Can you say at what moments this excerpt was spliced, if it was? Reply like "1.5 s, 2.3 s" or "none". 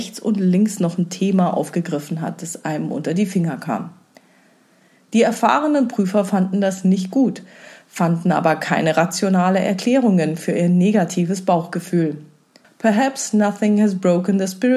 12.6 s